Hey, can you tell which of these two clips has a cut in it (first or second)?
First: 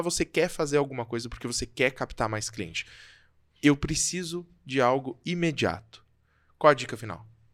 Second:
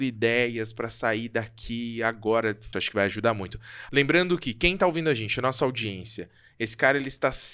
second